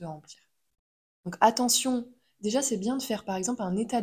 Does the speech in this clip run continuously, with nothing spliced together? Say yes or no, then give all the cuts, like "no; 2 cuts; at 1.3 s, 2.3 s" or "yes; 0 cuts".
no; 1 cut; at 1.1 s